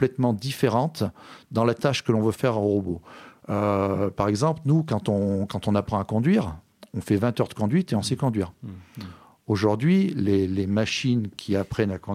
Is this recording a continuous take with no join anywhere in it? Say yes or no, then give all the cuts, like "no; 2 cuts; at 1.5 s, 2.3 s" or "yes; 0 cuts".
yes; 0 cuts